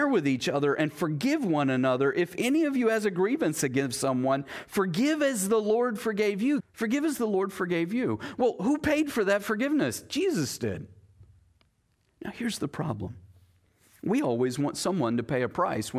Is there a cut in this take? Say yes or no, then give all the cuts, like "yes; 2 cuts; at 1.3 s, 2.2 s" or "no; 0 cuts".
yes; 1 cut; at 6.6 s